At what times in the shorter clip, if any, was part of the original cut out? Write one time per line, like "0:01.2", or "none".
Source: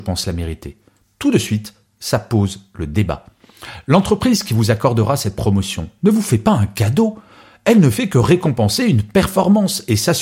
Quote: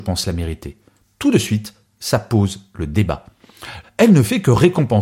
0:03.8